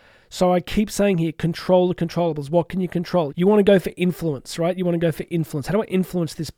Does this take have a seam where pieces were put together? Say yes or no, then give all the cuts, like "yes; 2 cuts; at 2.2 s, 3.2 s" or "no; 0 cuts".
yes; 1 cut; at 3.3 s